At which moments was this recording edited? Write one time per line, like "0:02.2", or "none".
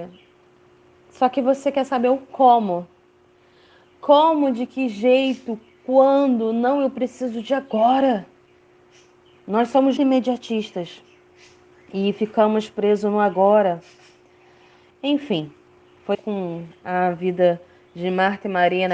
0:10.0
0:14.9
0:16.1